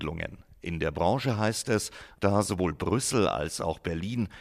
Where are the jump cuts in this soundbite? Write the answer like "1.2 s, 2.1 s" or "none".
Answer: 2.2 s